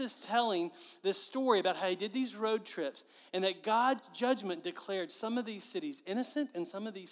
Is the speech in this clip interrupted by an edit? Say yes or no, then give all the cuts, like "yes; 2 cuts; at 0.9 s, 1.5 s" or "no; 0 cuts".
no; 0 cuts